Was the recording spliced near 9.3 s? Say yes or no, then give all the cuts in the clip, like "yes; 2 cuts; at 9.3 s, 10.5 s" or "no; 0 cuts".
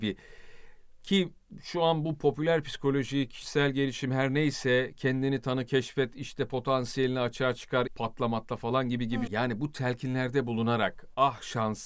yes; 2 cuts; at 7.9 s, 9.3 s